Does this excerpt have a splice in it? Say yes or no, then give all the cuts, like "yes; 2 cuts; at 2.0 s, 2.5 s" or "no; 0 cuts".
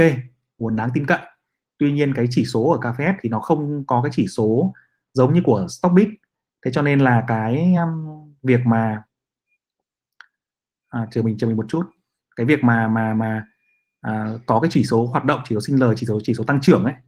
no; 0 cuts